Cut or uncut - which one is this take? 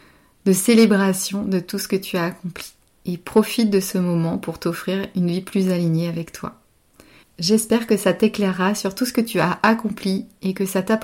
uncut